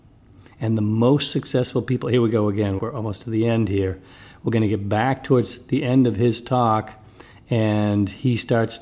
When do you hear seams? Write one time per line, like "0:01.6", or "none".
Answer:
0:02.8